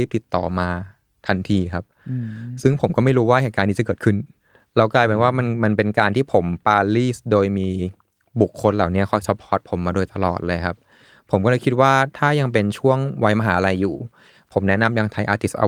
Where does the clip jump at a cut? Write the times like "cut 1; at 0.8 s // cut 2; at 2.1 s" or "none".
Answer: cut 1; at 6.6 s